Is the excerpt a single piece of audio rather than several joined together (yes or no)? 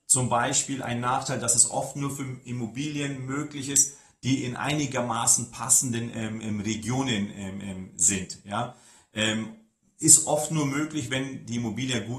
yes